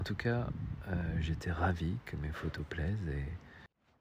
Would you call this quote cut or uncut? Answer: uncut